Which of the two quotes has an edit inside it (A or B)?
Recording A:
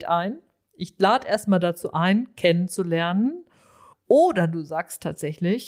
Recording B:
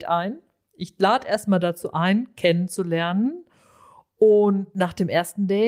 A